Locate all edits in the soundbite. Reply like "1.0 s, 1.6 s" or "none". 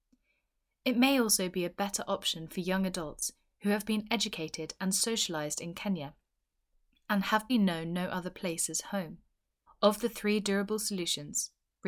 7.5 s, 9.7 s